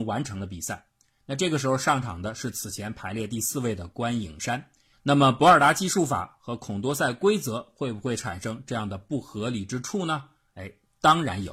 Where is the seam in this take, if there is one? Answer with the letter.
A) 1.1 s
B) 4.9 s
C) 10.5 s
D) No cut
B